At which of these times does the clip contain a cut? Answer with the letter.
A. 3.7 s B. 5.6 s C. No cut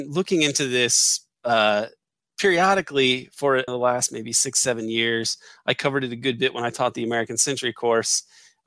A